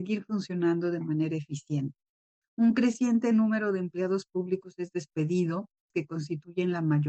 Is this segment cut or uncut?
cut